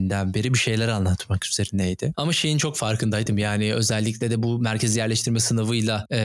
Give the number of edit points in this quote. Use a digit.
1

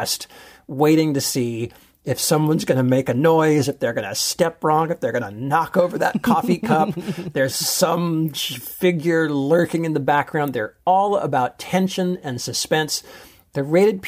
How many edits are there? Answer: 1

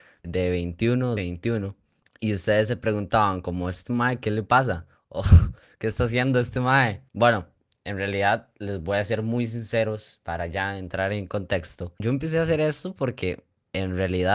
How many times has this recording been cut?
1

